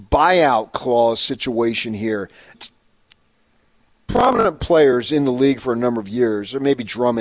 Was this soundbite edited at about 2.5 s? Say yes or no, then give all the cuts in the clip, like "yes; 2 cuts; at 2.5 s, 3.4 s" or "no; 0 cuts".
yes; 1 cut; at 2.5 s